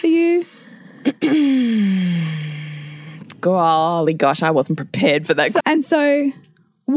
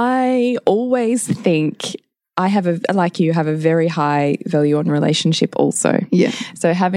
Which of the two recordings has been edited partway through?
first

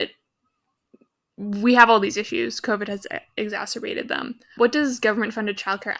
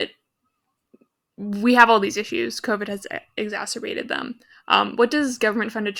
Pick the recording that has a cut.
first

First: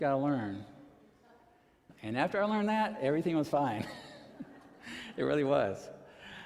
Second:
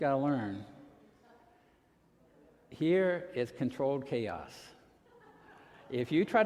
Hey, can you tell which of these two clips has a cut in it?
first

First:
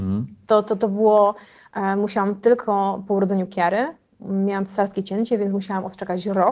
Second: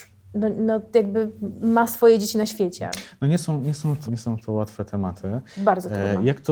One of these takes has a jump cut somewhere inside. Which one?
second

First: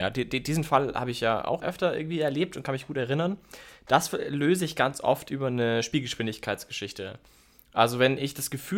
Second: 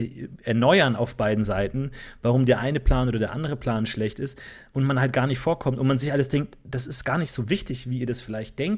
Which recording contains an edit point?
first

